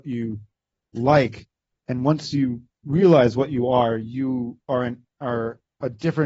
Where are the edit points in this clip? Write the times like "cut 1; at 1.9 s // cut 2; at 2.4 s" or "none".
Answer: cut 1; at 1.8 s